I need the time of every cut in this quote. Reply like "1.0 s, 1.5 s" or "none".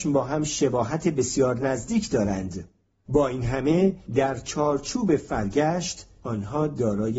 none